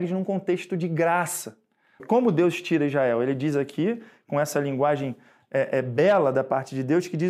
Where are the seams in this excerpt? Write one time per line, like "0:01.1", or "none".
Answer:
0:02.0